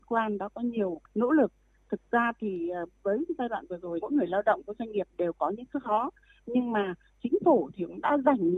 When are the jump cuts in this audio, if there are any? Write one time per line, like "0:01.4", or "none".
0:04.0